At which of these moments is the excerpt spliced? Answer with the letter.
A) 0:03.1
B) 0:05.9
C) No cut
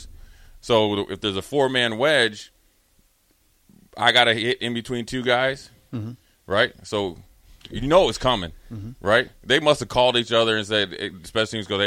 B